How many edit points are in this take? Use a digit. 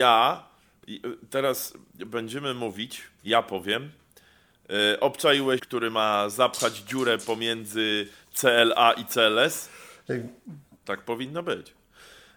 2